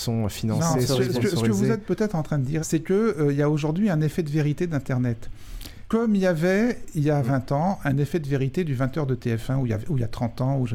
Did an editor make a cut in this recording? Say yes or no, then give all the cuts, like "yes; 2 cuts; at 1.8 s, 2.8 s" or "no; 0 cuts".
yes; 1 cut; at 2.6 s